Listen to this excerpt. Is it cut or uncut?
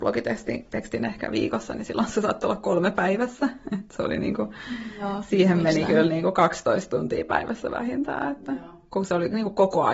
uncut